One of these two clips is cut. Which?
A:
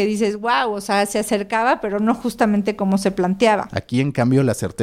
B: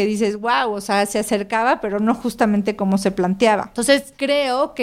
A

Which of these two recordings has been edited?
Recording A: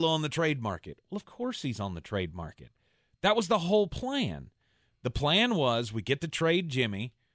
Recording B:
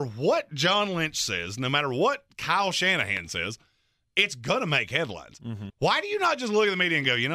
B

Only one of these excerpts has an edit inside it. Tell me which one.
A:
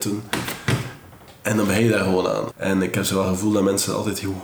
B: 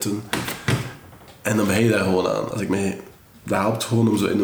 A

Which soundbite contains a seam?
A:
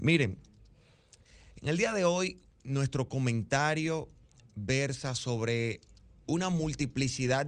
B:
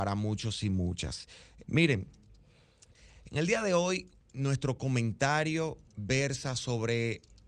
B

